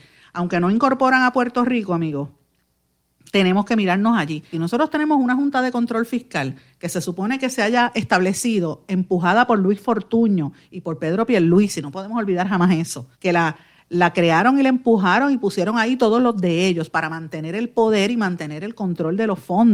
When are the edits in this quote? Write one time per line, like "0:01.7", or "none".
0:04.5
0:13.1